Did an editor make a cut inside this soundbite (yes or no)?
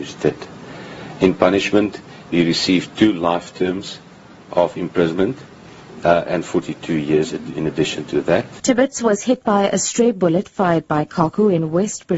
yes